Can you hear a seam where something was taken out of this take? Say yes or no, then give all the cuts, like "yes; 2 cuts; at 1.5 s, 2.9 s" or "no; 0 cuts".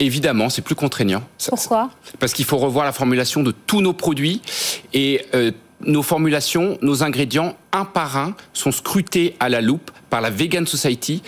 no; 0 cuts